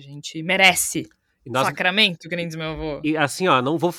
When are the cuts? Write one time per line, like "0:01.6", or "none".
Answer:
none